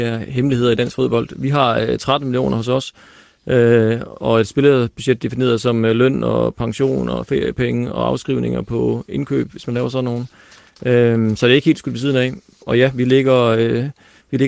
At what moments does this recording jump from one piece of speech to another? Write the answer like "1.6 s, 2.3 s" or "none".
none